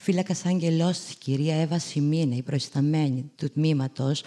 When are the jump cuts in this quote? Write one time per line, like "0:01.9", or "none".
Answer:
0:03.3